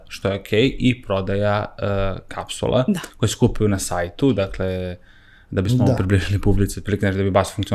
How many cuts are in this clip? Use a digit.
0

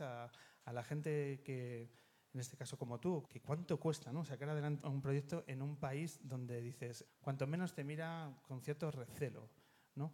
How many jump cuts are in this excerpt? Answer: 3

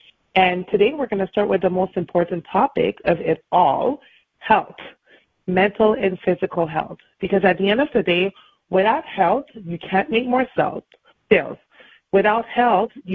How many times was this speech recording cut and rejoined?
0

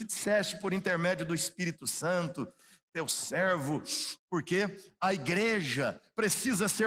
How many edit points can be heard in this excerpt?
1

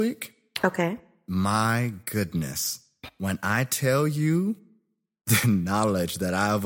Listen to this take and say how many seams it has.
0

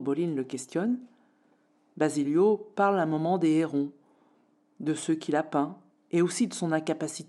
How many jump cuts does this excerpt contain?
1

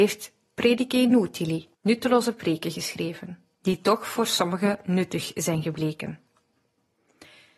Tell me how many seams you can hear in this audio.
2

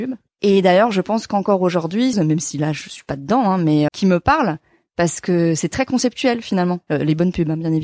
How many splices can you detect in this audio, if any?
2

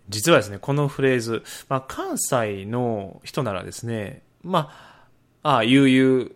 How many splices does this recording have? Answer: 0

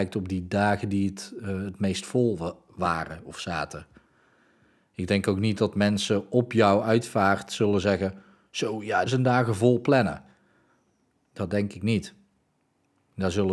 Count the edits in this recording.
1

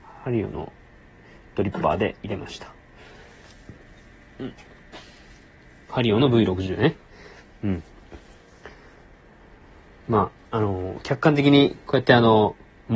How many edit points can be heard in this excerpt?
0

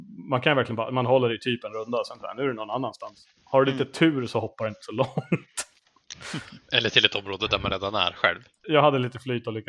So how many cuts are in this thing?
1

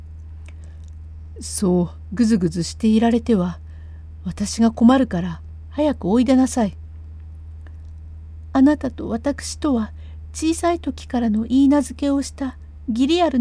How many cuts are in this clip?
0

